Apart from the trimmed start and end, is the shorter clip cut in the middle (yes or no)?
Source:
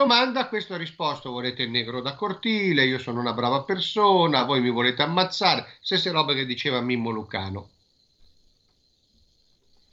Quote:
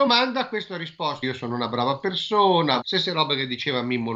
yes